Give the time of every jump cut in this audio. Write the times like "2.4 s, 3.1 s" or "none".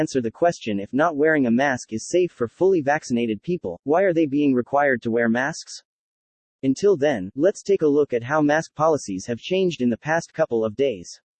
3.8 s, 6.4 s

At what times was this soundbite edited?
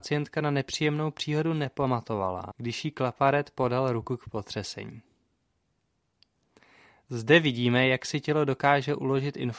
2.5 s

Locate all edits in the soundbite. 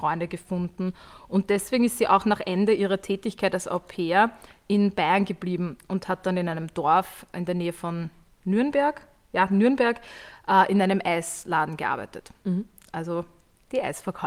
none

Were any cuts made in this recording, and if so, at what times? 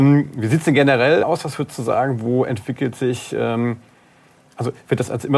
1.2 s

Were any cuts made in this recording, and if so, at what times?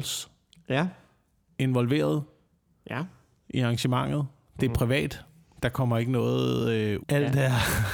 7.0 s

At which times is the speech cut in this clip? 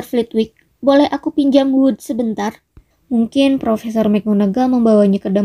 2.9 s

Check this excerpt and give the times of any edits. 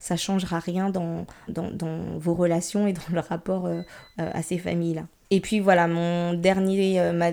1.5 s, 5.2 s

